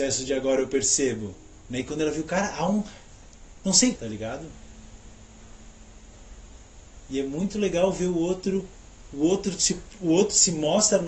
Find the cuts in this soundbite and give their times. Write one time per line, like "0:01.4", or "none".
0:04.0

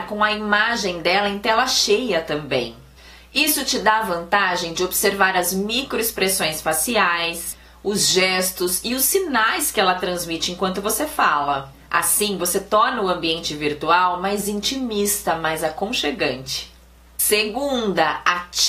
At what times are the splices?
none

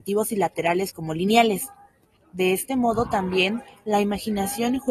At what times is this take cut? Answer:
0:02.2

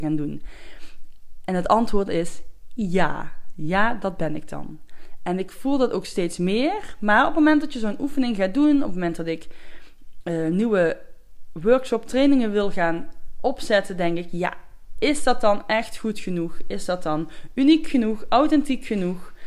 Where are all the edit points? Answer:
none

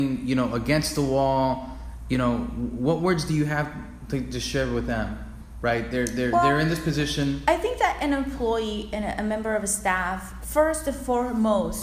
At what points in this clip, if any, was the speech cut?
0:10.4

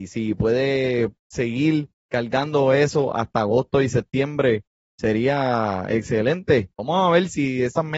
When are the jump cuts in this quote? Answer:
0:01.2
0:06.8

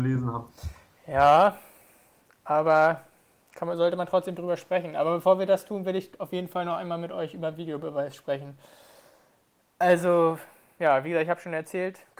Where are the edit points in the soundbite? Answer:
none

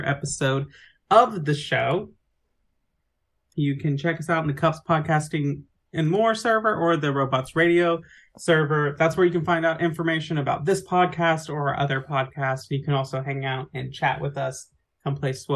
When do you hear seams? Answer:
0:03.5

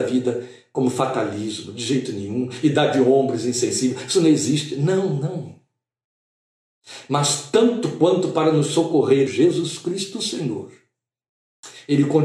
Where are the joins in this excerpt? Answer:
0:09.3

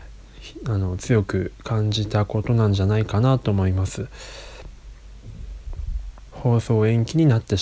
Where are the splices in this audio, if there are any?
0:06.3

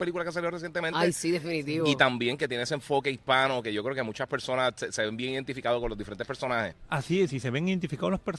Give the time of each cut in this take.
none

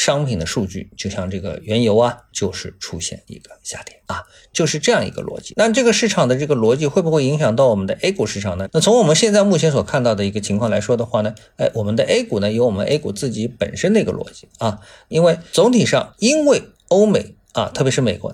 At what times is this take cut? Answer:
0:05.5

